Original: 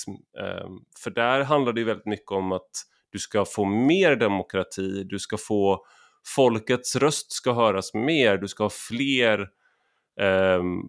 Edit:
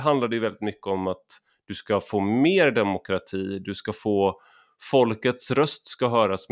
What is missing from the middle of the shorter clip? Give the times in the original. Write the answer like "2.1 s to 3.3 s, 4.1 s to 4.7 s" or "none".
none